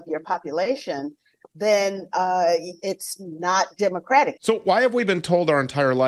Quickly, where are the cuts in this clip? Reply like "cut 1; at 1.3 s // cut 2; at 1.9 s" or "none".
cut 1; at 4.4 s